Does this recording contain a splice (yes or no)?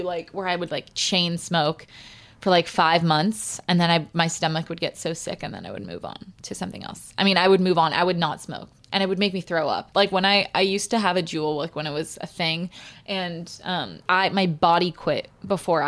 yes